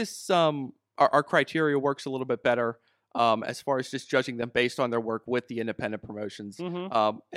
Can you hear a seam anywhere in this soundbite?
no; 0 cuts

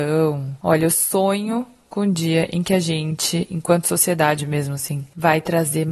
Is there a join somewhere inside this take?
no; 0 cuts

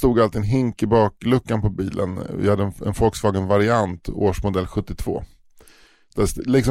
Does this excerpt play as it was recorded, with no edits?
yes; 0 cuts

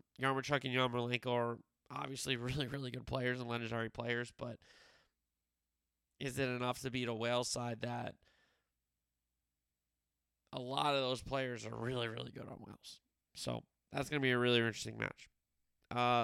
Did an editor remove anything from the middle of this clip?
no; 0 cuts

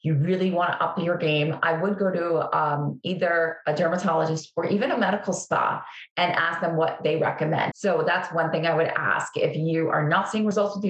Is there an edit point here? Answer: yes; 1 cut; at 7.7 s

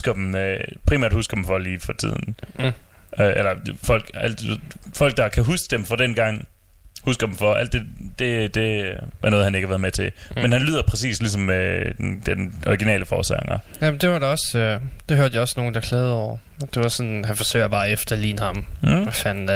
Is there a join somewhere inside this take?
no; 0 cuts

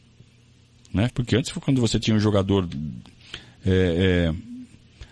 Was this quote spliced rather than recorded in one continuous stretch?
yes; 1 cut; at 1.1 s

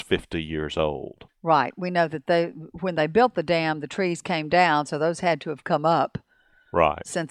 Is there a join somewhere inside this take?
yes; 1 cut; at 1.3 s

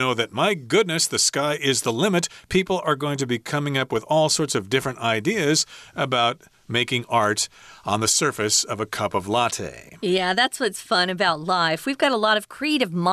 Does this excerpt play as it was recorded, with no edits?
yes; 0 cuts

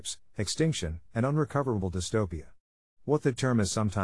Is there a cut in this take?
yes; 1 cut; at 1.1 s

